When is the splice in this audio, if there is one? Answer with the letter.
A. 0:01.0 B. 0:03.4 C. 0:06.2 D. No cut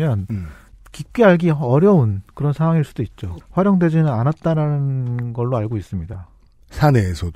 B